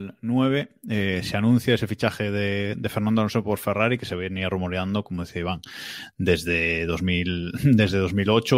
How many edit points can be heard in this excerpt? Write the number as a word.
zero